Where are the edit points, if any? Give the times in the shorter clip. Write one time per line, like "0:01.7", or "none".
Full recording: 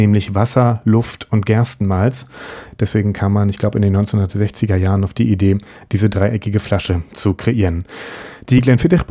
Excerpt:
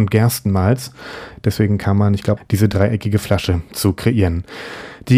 0:02.4

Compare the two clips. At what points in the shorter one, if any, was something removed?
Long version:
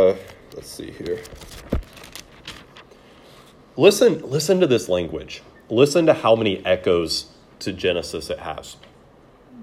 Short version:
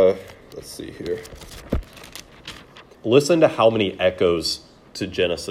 0:02.9

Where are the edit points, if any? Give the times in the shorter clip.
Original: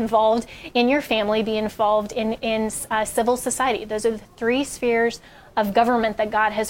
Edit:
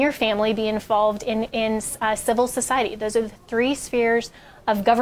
none

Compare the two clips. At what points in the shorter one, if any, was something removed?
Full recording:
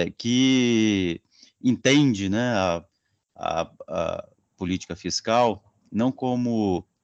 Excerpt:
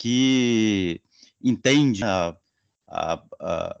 0:02.0

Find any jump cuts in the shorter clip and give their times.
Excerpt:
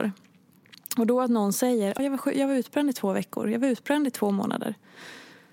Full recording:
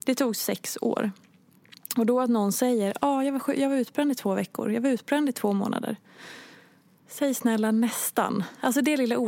0:02.0

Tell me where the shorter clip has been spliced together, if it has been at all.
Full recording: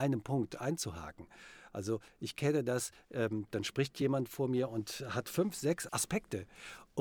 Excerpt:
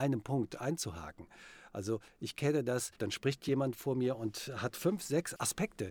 0:02.9

